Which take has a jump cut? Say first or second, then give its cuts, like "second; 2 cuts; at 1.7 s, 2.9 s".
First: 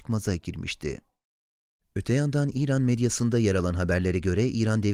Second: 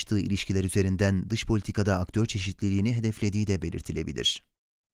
first; 1 cut; at 1.8 s